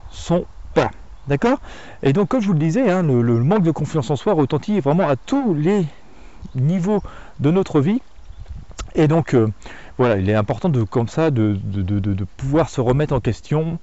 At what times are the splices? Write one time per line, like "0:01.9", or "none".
none